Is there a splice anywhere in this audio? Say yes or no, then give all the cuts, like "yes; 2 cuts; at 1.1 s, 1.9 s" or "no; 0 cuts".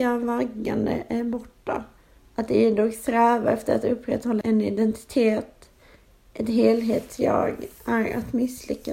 yes; 1 cut; at 2.1 s